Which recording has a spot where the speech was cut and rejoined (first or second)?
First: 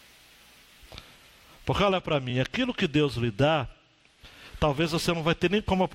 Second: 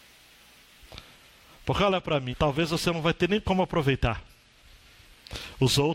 second